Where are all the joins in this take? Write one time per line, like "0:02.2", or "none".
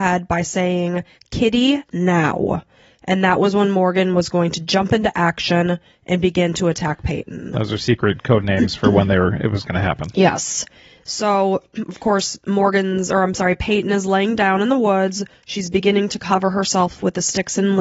none